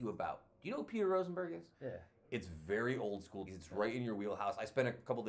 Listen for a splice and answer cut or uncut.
cut